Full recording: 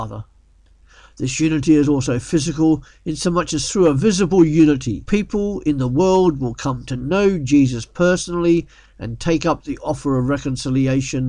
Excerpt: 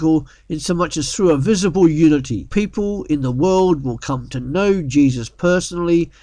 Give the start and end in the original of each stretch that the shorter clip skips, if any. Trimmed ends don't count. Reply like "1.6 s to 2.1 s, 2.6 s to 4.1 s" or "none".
none